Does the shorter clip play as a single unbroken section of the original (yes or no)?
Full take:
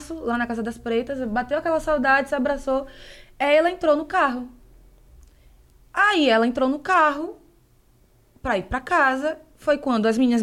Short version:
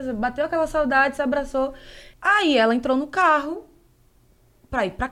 no